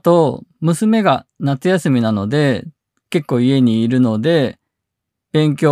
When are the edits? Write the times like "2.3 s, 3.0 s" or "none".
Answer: none